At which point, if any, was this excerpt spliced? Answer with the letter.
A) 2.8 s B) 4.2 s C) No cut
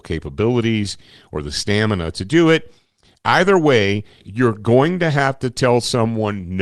B